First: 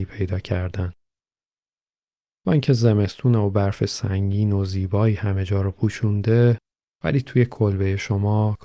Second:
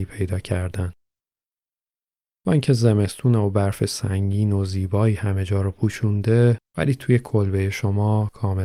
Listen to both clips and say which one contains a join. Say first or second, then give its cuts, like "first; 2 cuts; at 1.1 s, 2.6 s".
second; 1 cut; at 6.7 s